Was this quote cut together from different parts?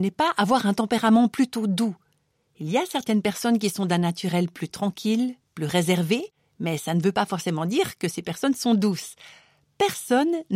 no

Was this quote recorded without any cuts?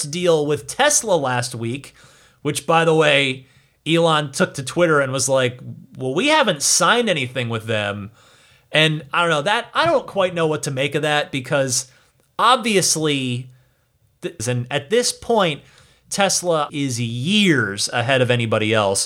no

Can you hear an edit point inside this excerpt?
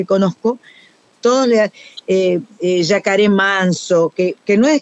yes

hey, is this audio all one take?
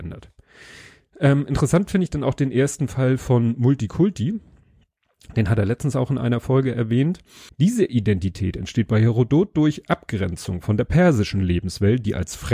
no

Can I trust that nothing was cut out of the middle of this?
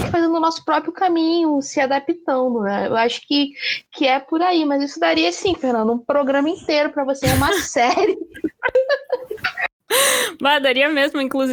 yes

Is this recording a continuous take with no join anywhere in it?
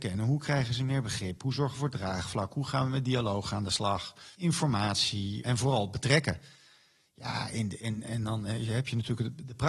no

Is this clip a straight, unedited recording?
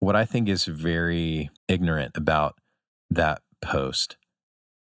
no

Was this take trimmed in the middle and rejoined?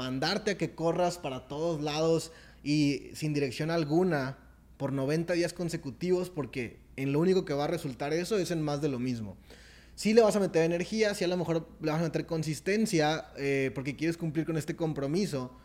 no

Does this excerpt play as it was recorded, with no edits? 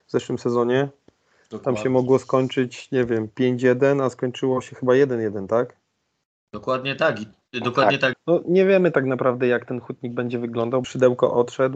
no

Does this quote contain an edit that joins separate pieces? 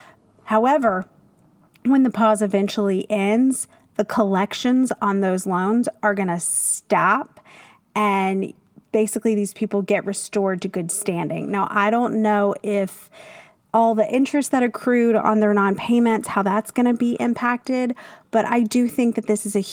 no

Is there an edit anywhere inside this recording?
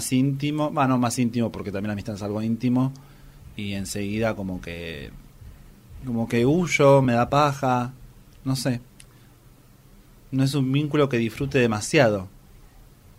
no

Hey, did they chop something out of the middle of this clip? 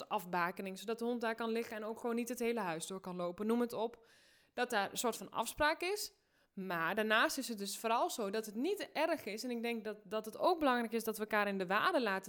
no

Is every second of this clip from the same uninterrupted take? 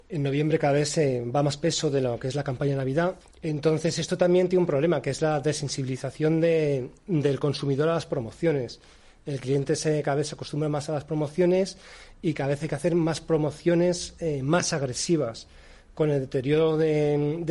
no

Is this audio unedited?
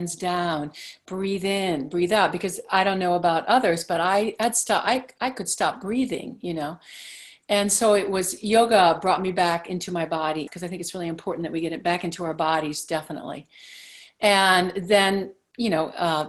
no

